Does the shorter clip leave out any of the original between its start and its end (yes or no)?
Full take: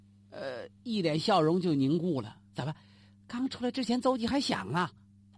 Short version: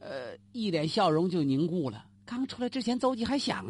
yes